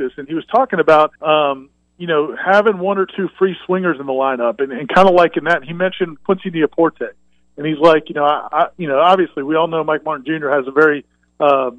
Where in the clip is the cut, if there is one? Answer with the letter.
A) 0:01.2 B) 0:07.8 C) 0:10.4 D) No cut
A